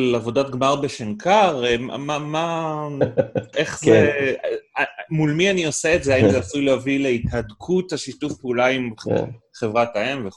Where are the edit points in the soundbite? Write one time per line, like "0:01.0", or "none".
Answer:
0:03.5

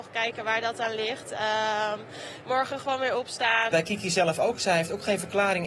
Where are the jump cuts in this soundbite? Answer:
0:02.4
0:03.7

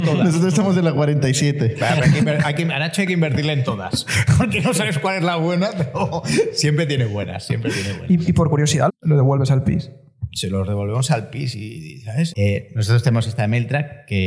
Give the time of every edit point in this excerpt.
0:08.9
0:12.3

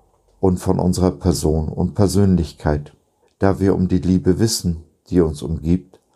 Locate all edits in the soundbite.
0:03.2

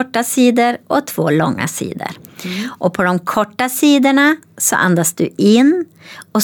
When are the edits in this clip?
none

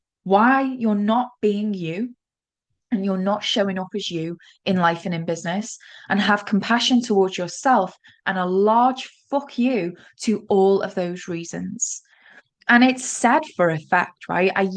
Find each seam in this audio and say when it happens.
none

